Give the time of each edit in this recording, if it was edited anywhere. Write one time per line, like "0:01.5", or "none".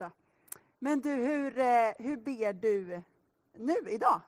none